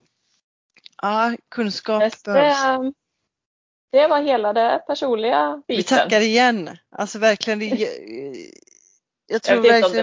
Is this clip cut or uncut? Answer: cut